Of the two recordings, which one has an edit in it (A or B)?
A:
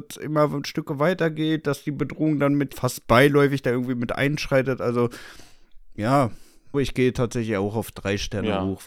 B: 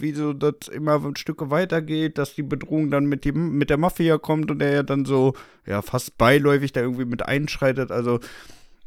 A